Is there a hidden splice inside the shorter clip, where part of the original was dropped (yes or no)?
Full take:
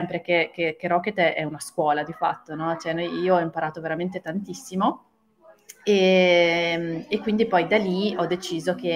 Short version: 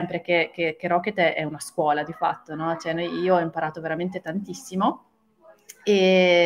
no